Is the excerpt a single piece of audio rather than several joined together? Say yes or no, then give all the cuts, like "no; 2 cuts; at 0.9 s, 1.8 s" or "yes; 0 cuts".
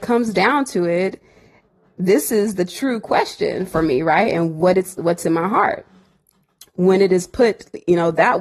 yes; 0 cuts